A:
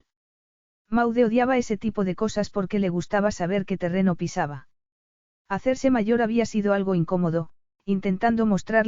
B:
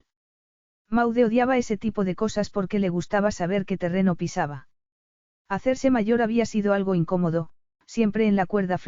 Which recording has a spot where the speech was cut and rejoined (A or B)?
A